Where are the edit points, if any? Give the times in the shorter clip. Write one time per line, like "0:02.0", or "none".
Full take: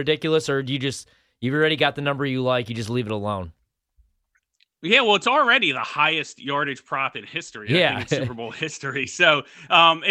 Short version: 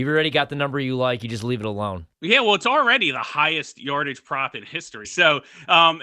0:02.1
0:05.0